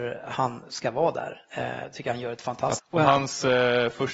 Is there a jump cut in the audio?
yes; 1 cut; at 2.8 s

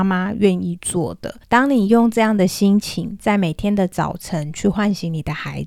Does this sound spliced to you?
yes; 1 cut; at 1.4 s

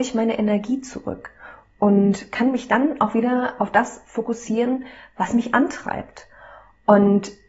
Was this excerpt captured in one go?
yes; 0 cuts

